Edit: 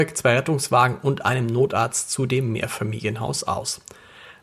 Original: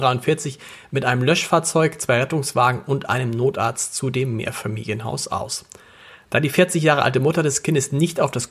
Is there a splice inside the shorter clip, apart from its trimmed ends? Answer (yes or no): no